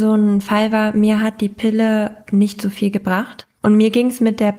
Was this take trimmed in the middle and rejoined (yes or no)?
yes